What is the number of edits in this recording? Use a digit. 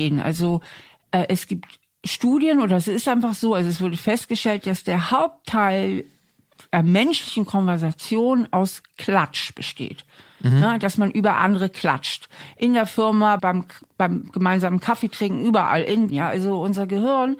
2